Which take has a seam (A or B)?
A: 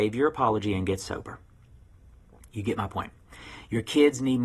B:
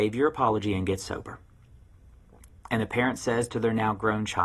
B